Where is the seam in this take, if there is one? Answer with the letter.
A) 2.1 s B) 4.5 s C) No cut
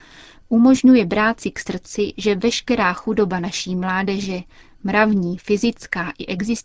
C